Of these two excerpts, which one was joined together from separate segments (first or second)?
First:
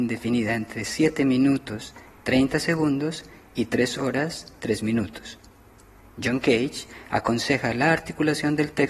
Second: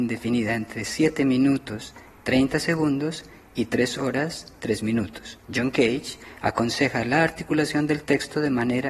second